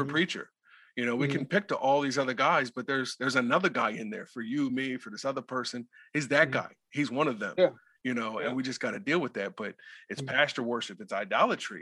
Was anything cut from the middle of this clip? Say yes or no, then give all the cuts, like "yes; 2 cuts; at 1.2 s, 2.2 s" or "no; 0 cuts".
no; 0 cuts